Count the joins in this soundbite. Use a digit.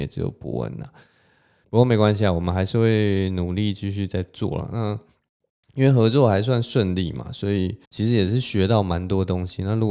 2